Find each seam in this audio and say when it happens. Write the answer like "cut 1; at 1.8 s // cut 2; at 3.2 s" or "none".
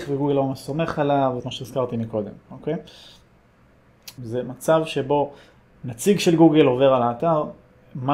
cut 1; at 1.4 s // cut 2; at 4.2 s

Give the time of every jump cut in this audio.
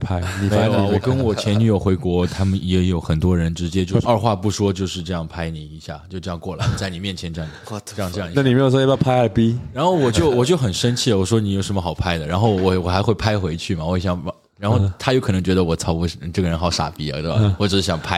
cut 1; at 4.0 s

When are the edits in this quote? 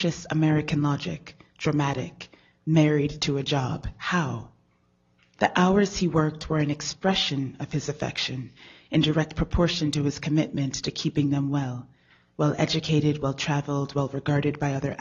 none

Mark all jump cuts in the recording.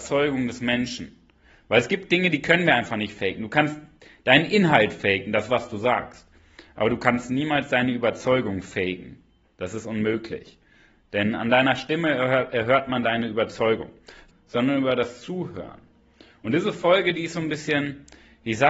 cut 1; at 14.3 s

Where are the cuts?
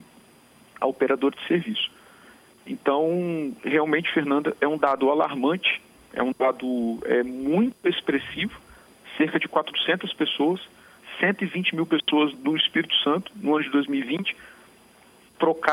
cut 1; at 12.3 s

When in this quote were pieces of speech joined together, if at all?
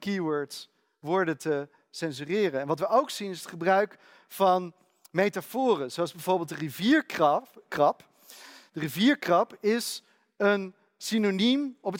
none

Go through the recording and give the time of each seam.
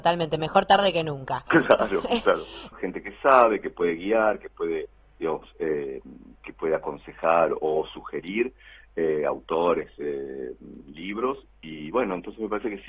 cut 1; at 2.7 s

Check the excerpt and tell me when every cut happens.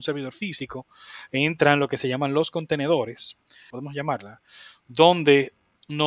cut 1; at 3.7 s

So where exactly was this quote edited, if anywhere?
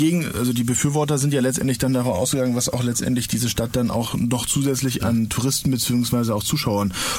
cut 1; at 5.0 s

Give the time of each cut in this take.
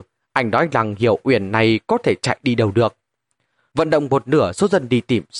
cut 1; at 3.7 s

